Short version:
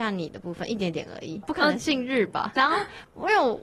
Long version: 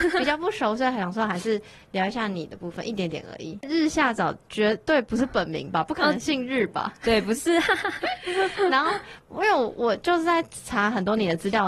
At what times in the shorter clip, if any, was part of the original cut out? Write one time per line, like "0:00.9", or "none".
0:01.4
0:02.6